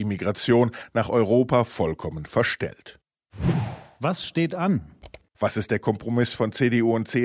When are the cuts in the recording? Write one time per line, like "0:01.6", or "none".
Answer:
0:05.3